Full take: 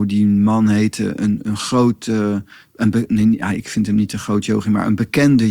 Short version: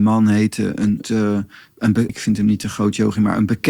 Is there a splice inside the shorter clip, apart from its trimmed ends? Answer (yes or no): yes